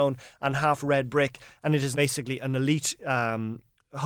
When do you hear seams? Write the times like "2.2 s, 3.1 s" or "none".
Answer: 1.9 s